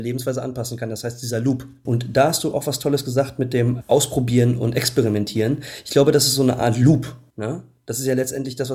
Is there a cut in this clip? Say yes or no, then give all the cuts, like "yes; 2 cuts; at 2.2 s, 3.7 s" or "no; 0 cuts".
yes; 2 cuts; at 1.9 s, 7.3 s